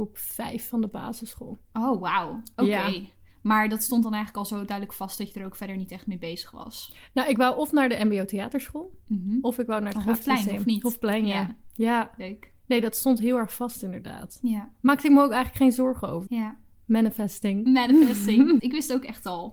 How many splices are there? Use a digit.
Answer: 2